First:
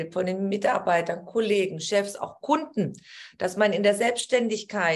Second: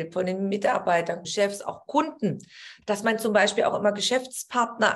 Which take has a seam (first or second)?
second